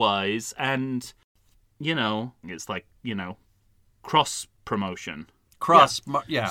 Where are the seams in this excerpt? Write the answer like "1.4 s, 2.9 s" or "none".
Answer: 2.4 s